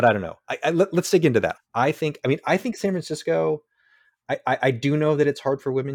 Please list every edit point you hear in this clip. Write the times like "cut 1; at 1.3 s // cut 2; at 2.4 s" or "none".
cut 1; at 1.5 s